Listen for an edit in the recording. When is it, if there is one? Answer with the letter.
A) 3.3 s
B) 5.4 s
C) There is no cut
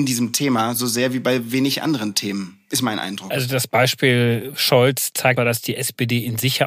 B